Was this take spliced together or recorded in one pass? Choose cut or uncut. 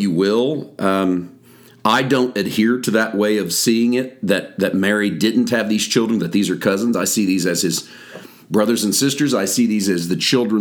uncut